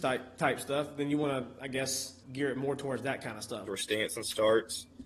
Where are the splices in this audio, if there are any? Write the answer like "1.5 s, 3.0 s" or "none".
2.2 s, 3.7 s